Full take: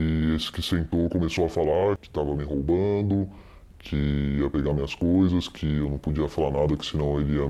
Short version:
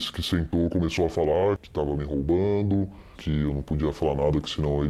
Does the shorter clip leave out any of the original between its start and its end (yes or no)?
yes